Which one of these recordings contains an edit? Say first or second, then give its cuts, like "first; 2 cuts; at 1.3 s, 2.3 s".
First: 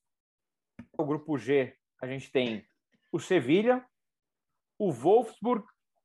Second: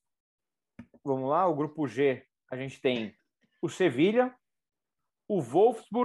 first; 1 cut; at 1.0 s